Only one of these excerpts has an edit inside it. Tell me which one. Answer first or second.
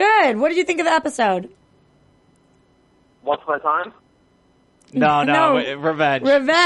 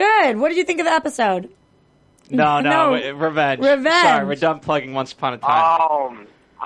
second